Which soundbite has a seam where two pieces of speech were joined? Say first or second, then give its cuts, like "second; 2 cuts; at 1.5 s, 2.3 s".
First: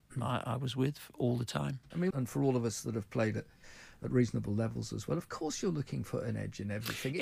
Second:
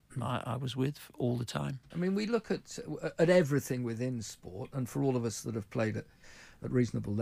first; 1 cut; at 2.1 s